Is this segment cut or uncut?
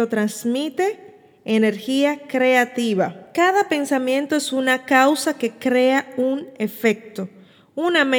uncut